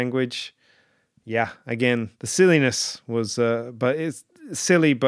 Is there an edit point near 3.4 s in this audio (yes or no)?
no